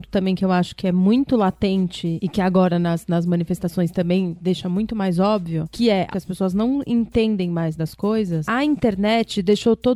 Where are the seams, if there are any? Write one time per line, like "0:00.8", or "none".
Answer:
0:06.1